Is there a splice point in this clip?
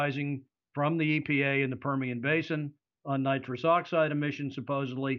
no; 0 cuts

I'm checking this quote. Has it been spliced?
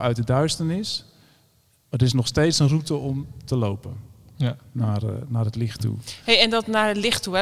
no; 0 cuts

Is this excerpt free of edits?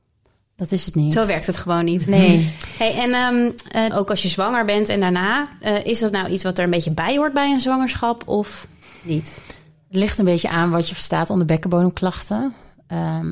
no; 1 cut; at 3.9 s

